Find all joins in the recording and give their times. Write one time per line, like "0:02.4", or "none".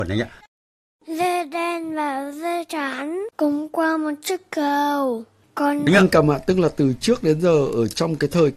0:03.3
0:05.9